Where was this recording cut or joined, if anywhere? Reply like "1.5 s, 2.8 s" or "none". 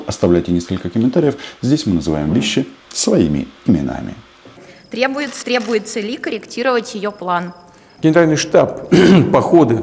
2.8 s, 5.4 s, 8.0 s